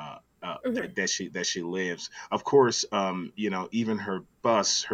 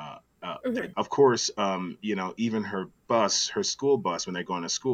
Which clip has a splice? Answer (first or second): second